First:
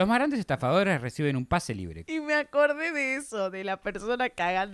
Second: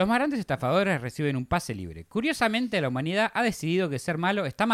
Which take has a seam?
first; 1 cut; at 2.1 s

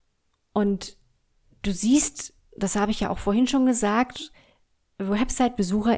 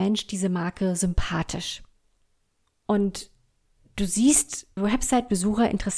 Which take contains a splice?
second; 1 cut; at 4.8 s

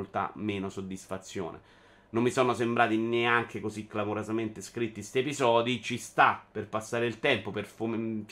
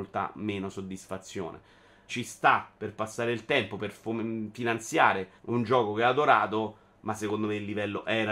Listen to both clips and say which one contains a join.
second; 2 cuts; at 2.1 s, 5.4 s

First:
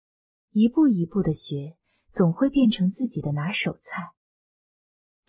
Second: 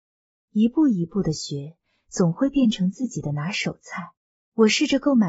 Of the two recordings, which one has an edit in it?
second; 1 cut; at 4.4 s

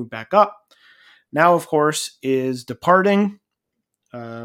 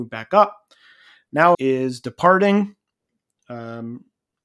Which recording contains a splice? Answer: second; 1 cut; at 1.5 s

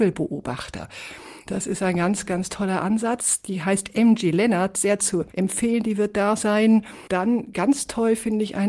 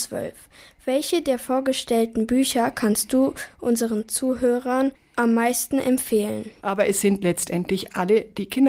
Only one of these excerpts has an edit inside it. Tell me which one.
second; 1 cut; at 6.6 s

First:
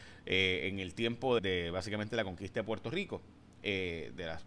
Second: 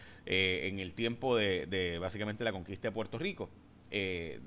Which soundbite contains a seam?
first; 1 cut; at 1.4 s

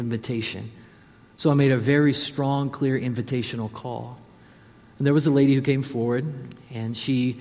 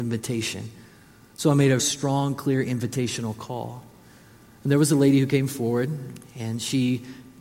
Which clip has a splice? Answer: second; 1 cut; at 1.8 s

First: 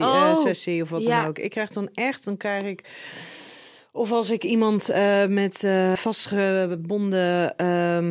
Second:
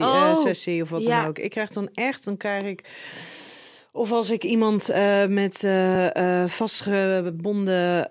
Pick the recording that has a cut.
first; 1 cut; at 6.0 s

